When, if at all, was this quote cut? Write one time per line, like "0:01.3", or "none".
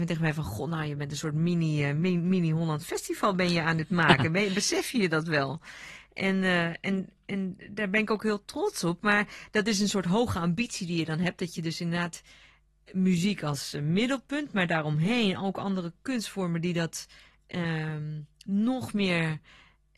none